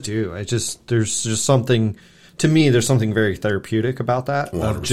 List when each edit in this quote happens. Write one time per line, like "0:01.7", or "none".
none